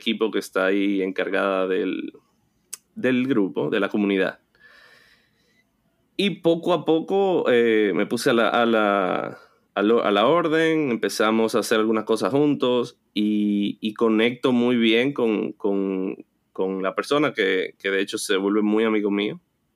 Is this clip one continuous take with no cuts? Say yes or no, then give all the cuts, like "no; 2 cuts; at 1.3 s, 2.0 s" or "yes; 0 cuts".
yes; 0 cuts